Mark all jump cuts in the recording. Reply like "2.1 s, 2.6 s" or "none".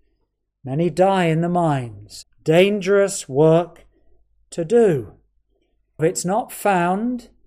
2.2 s, 6.0 s